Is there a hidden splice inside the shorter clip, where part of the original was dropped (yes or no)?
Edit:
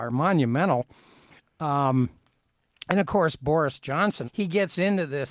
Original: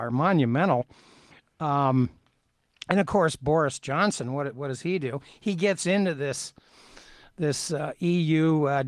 yes